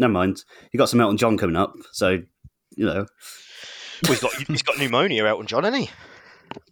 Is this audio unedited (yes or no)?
yes